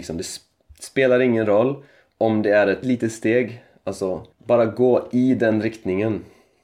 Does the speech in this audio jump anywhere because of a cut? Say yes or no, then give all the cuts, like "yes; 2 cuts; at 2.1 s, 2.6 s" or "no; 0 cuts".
yes; 2 cuts; at 2.8 s, 4.3 s